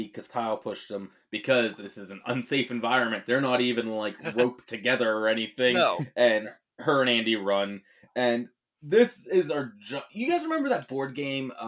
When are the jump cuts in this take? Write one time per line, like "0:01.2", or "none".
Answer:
none